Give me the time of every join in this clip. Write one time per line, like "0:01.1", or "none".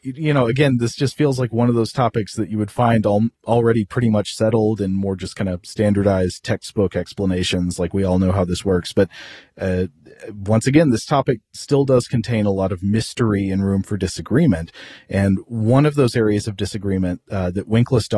none